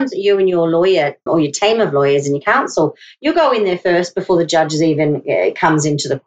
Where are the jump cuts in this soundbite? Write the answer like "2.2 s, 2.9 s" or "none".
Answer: 1.3 s